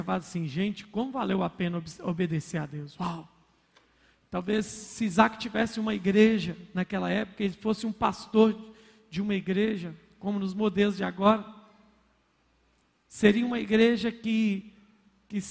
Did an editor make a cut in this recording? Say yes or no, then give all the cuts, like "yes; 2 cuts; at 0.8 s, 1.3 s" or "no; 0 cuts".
no; 0 cuts